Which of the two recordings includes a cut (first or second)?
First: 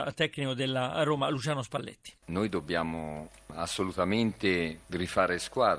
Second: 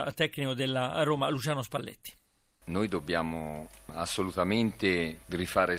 first